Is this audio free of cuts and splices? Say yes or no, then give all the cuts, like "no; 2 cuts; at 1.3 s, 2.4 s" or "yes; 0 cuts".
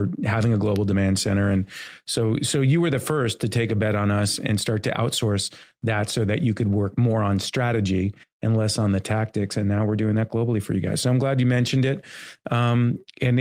yes; 0 cuts